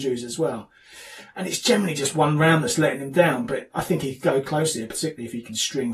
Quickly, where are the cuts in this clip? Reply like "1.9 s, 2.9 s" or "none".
none